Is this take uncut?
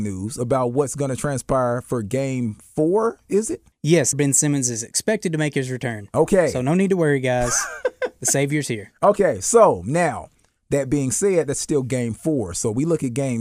no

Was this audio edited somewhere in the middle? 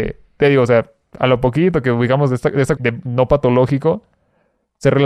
yes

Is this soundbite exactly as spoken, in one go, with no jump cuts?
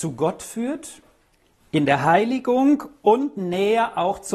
yes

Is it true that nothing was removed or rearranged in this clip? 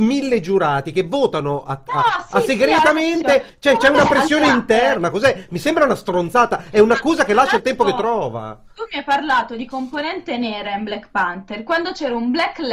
yes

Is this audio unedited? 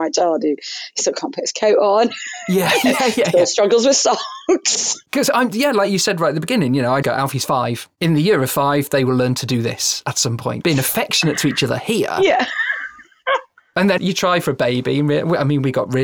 no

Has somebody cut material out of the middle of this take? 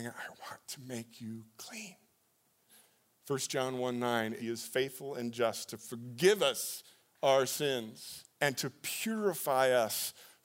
yes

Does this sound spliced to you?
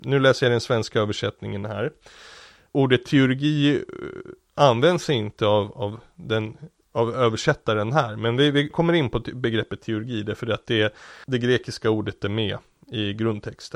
no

